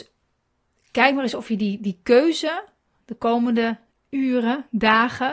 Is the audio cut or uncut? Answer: uncut